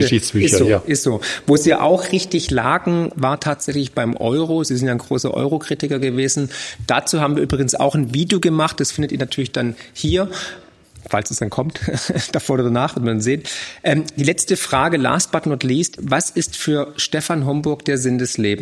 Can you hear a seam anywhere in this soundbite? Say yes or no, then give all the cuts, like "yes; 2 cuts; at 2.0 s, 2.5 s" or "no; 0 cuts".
yes; 1 cut; at 16.0 s